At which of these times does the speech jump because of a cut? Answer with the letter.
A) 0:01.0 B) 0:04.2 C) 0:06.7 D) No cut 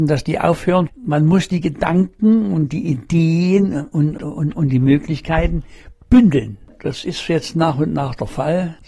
B